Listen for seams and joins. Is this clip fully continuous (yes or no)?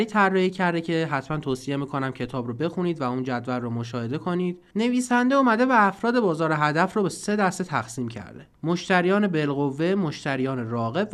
no